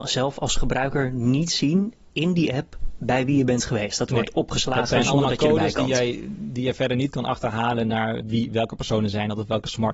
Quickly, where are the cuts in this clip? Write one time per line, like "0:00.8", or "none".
0:08.2